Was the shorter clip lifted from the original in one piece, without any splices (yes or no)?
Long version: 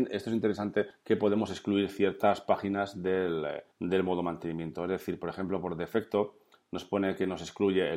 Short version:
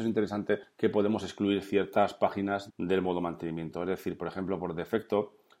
no